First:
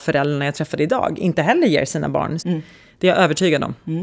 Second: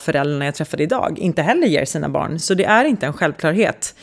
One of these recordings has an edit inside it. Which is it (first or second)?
first